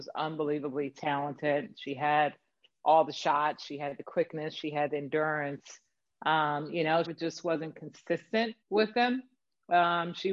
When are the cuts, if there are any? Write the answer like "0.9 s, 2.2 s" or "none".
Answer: 7.0 s, 8.6 s